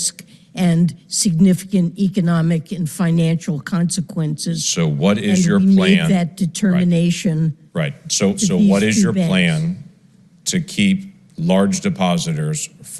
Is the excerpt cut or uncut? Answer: uncut